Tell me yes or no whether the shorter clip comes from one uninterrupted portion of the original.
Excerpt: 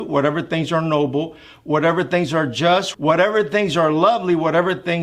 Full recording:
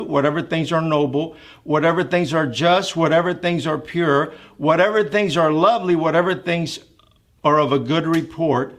no